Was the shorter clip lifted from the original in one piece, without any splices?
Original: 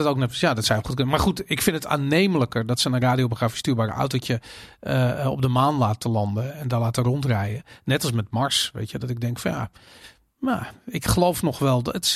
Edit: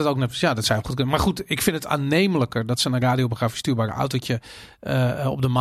yes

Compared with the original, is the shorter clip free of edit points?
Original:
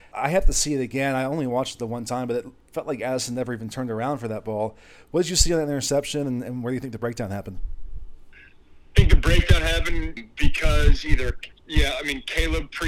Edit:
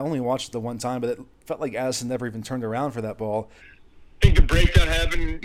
no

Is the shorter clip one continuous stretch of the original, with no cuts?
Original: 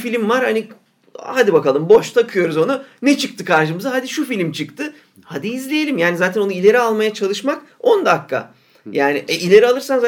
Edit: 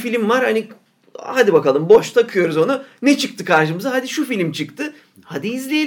yes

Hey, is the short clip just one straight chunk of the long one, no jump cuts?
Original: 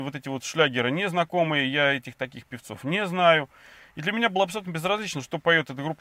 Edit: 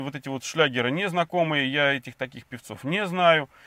yes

